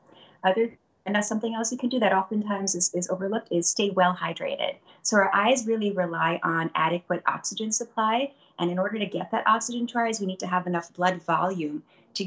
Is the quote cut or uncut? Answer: uncut